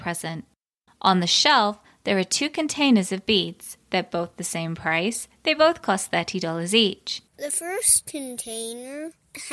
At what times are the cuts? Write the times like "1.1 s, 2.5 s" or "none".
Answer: 7.3 s